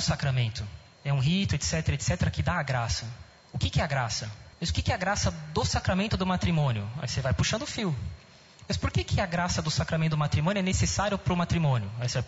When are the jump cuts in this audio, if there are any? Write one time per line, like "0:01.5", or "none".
0:04.5